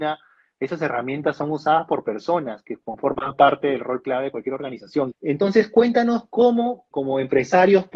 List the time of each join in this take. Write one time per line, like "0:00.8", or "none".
0:05.1
0:06.9